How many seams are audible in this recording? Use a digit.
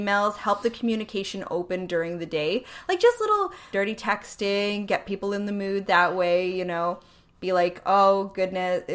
1